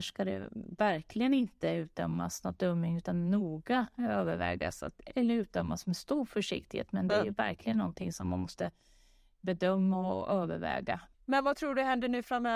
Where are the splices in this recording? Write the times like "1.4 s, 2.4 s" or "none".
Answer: 11.1 s